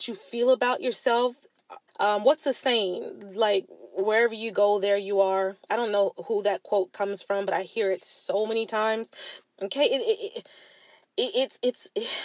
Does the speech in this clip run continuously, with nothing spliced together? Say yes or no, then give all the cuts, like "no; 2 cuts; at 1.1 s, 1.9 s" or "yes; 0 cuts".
no; 2 cuts; at 1.9 s, 9.4 s